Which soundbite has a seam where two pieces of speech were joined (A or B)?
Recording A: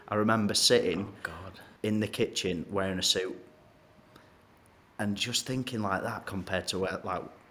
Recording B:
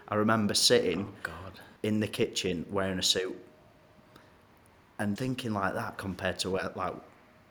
B